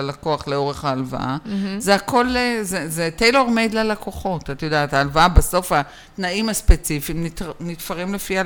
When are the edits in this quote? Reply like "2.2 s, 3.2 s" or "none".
none